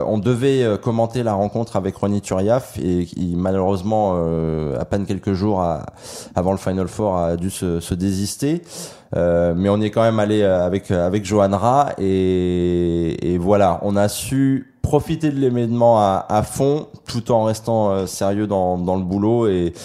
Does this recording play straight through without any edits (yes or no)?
yes